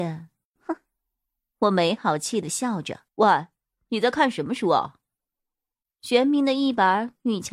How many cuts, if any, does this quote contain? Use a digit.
1